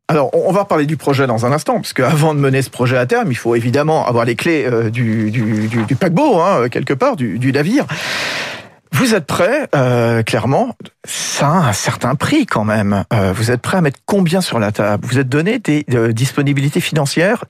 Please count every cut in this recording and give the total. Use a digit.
1